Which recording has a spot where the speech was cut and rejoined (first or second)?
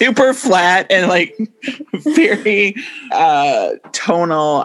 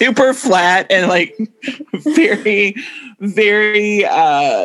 first